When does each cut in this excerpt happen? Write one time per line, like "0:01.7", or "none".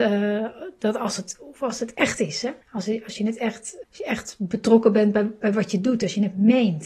0:02.6
0:03.8